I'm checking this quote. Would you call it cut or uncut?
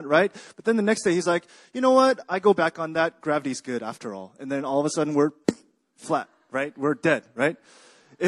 uncut